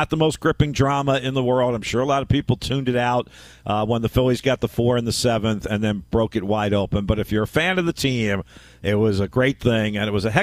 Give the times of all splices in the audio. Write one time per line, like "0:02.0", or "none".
none